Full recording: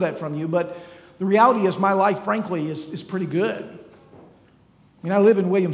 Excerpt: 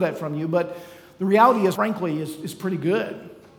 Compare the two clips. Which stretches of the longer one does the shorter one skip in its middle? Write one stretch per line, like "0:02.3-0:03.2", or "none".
0:01.8-0:02.2

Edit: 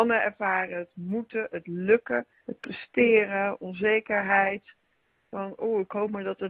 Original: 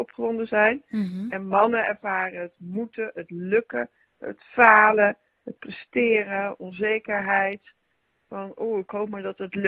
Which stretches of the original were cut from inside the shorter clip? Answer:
0:04.0-0:05.4

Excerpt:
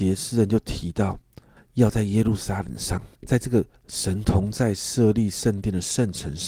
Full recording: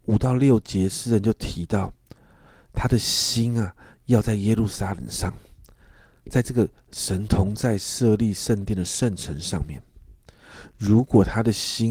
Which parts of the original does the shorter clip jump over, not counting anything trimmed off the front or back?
0:02.3-0:03.9
0:05.5-0:06.2

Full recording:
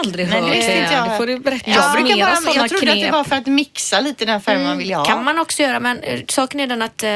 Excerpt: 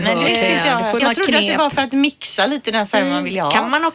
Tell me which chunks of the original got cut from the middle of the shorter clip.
0:01.3-0:02.5

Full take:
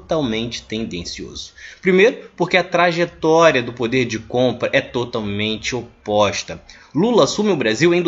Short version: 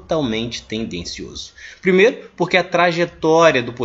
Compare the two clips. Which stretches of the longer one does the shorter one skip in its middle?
none

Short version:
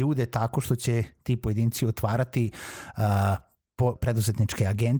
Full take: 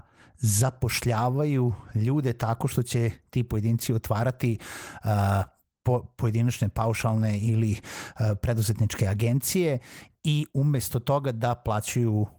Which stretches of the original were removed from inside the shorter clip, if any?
0:06.0-0:08.4

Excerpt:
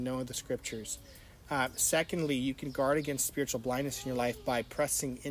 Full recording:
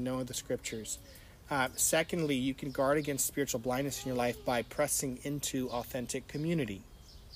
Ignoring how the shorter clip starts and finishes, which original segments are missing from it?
none

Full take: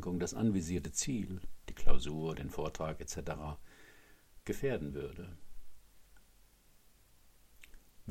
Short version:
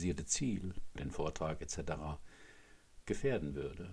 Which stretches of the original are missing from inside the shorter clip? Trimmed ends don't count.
0:01.6-0:02.3

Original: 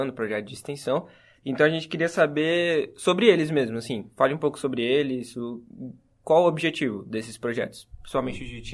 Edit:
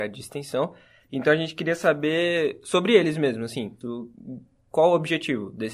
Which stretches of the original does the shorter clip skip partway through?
0:04.1-0:05.3

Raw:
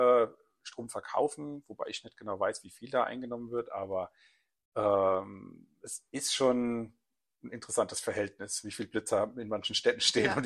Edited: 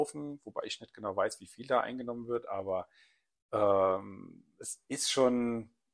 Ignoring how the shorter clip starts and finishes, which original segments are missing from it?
none

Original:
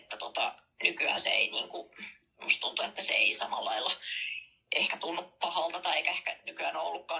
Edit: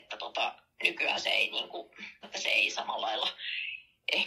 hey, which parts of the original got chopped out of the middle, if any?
0:02.2-0:02.9

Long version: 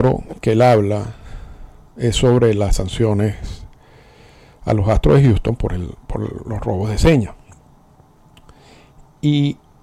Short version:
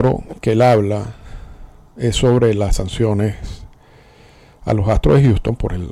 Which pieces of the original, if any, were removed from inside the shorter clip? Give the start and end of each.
none

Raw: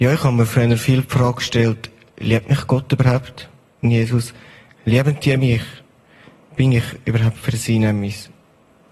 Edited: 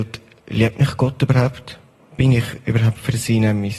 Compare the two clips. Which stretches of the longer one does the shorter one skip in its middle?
0:03.7-0:06.4

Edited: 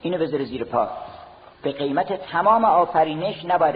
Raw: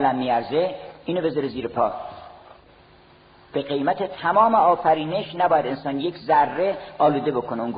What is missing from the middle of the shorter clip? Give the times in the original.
0:02.6-0:03.4

